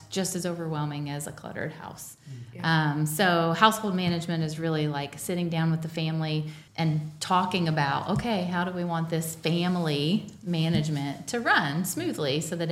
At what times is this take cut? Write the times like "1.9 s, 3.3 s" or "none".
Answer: 6.7 s